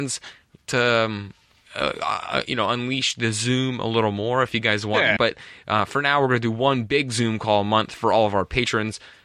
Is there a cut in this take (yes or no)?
yes